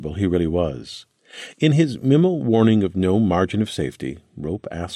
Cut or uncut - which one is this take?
uncut